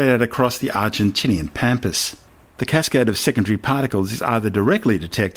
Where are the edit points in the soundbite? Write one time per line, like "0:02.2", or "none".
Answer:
0:02.5